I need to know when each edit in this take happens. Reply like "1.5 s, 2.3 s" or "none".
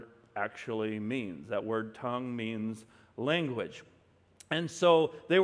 none